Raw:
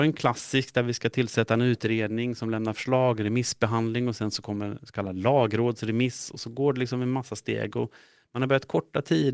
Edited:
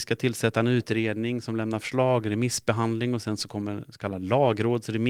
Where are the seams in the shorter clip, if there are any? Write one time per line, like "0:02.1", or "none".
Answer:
none

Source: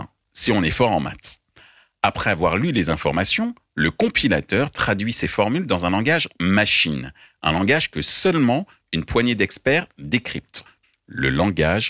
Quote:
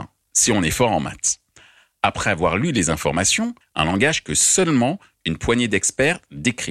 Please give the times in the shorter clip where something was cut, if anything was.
0:03.6

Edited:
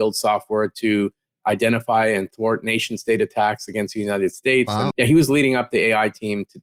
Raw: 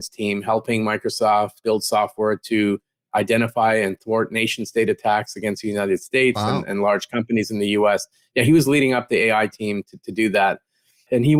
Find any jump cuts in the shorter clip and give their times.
0:04.9

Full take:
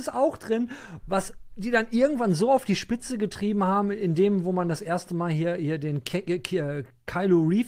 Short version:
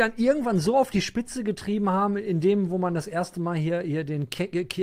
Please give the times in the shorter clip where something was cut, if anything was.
none

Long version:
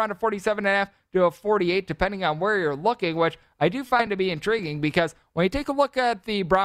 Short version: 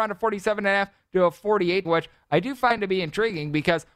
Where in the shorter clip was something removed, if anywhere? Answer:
0:01.8

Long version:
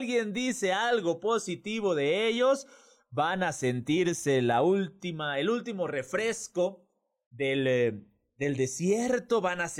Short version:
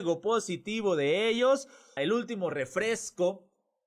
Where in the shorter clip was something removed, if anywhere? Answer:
0:02.0

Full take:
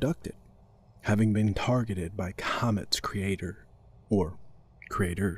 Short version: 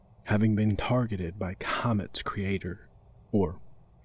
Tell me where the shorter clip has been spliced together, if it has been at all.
none

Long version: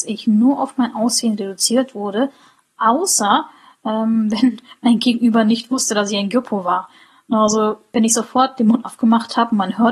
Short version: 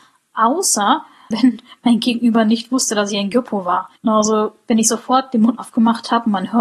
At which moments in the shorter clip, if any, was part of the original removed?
0:01.3
0:04.0

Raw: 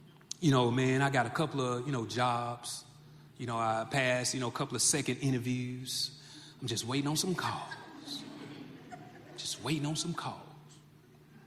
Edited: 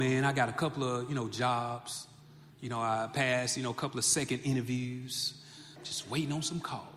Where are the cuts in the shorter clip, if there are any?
0:05.8

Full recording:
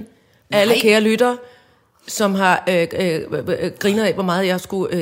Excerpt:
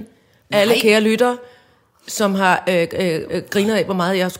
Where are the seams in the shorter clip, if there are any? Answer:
0:03.3

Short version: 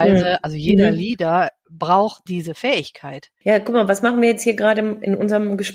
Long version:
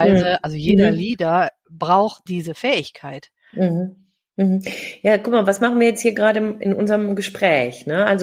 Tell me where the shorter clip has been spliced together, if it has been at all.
0:03.4

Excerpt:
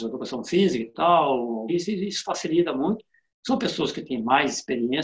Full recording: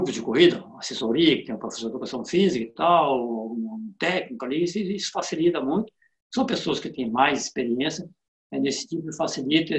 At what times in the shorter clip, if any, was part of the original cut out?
0:01.7

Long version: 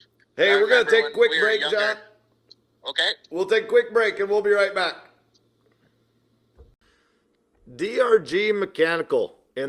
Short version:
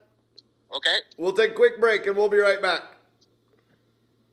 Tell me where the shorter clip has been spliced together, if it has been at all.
none

